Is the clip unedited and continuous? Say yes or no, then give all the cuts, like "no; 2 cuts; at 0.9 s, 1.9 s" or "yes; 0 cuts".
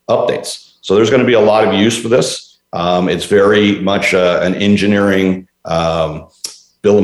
yes; 0 cuts